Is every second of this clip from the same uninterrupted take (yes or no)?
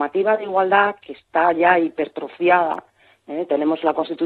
yes